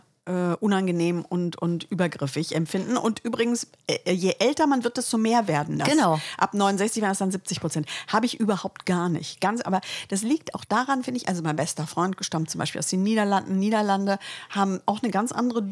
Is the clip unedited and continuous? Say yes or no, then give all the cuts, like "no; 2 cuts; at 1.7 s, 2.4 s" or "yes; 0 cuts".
yes; 0 cuts